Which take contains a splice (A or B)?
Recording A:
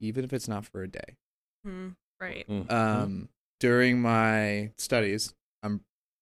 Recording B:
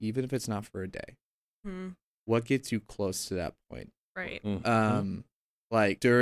A